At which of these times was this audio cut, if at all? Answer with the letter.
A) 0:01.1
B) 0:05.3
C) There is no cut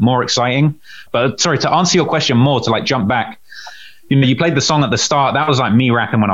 A